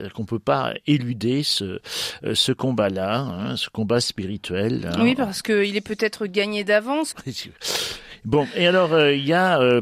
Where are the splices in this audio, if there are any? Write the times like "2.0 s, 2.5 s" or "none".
7.1 s